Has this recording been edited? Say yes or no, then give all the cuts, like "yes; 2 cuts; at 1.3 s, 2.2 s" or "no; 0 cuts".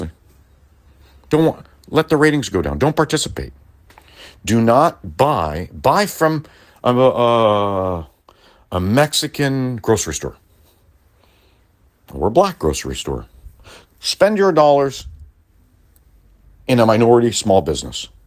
yes; 1 cut; at 13.9 s